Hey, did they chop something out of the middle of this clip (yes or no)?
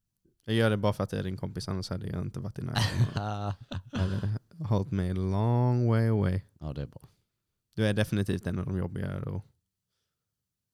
no